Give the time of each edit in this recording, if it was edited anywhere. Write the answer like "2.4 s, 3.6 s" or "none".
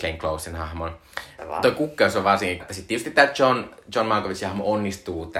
1.4 s, 2.6 s